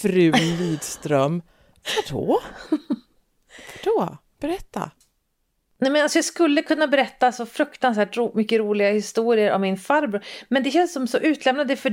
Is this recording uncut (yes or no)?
yes